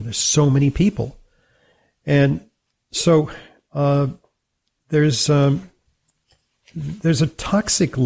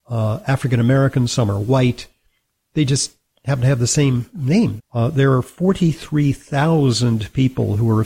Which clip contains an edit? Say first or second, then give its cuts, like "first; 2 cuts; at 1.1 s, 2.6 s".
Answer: second; 1 cut; at 4.8 s